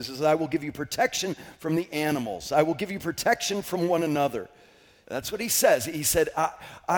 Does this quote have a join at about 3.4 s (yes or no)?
no